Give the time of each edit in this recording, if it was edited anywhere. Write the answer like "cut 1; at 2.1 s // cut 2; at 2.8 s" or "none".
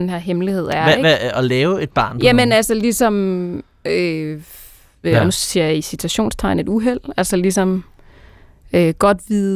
cut 1; at 5.0 s